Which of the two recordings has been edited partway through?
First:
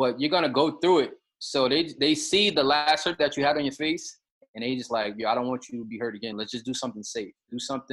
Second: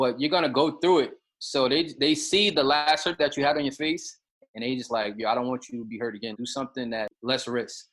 second; 1 cut; at 6.3 s

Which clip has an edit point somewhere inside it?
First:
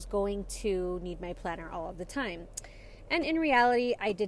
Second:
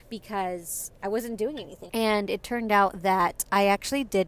second; 1 cut; at 1.9 s

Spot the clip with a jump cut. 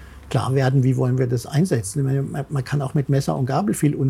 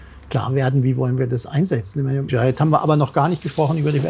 second; 1 cut; at 2.3 s

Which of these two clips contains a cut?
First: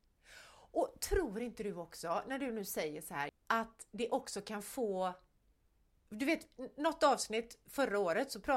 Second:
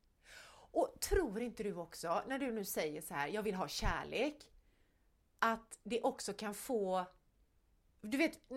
first; 1 cut; at 3.3 s

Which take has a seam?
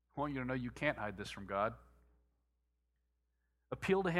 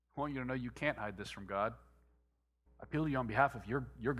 second; 1 cut; at 2.7 s

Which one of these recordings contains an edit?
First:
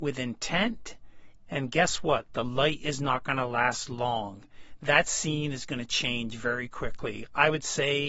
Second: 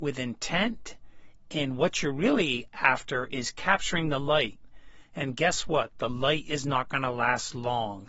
first; 1 cut; at 1.4 s

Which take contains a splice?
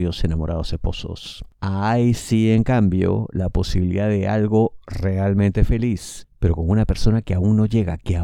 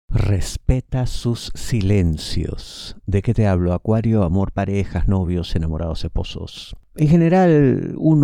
first; 1 cut; at 1.5 s

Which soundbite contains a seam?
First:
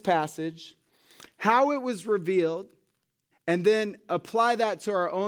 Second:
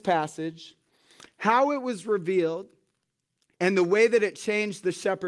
first; 1 cut; at 3.3 s

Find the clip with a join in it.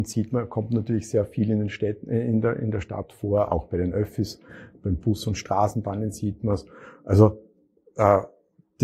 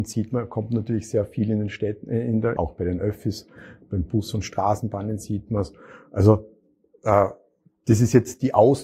second; 1 cut; at 2.6 s

